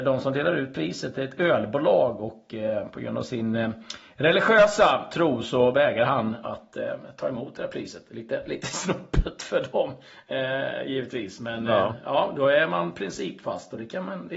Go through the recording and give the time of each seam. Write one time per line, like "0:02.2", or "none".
none